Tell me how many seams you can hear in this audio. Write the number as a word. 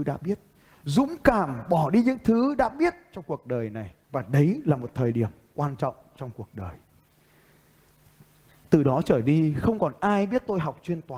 one